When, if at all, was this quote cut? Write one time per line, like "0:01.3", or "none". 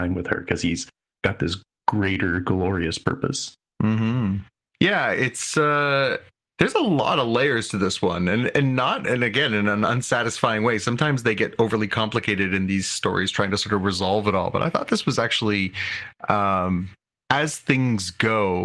0:04.7

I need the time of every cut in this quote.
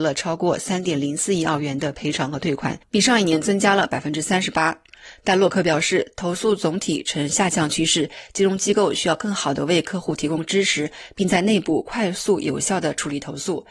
none

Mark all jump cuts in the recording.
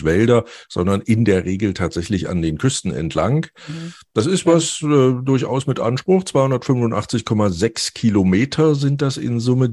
none

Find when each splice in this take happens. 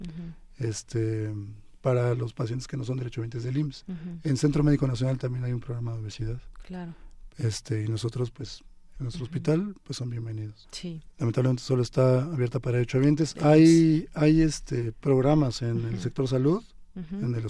0:09.0
0:10.6
0:13.3

